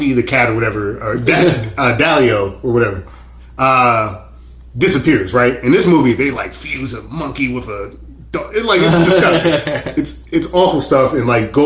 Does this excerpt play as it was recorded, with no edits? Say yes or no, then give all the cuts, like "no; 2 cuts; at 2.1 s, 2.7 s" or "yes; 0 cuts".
yes; 0 cuts